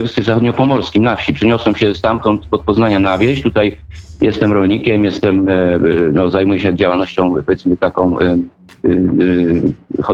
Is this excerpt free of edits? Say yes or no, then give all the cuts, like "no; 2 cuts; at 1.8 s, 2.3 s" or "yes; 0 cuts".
yes; 0 cuts